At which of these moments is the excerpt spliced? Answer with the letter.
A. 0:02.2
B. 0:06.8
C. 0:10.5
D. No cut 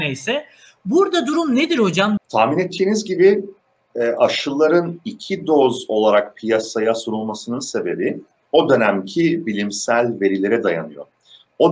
A